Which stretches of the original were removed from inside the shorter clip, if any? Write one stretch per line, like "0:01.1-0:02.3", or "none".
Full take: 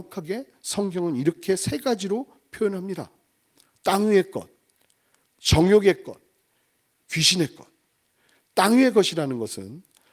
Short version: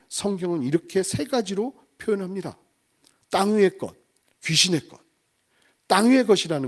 0:04.9-0:07.0